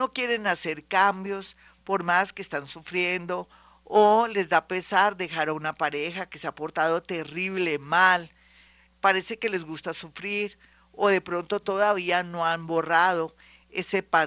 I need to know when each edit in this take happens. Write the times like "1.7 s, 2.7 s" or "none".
none